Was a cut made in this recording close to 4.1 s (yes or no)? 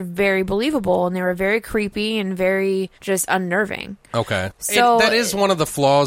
yes